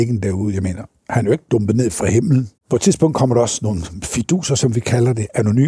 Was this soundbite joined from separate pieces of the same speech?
yes; 1 cut; at 2.6 s

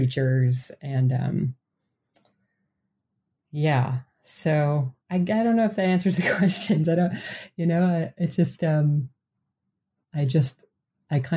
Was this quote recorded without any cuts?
no; 1 cut; at 5.0 s

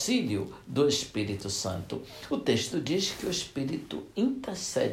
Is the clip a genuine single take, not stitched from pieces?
yes; 0 cuts

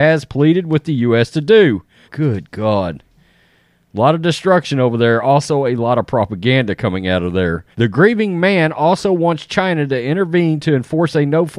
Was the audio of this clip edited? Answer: yes; 2 cuts; at 2.0 s, 7.7 s

